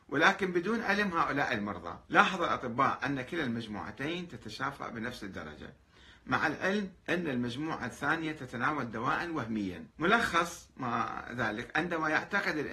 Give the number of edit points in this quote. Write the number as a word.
three